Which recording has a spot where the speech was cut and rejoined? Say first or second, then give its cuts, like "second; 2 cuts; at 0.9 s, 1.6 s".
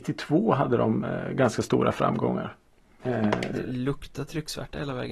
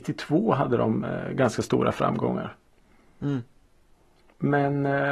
first; 1 cut; at 3.0 s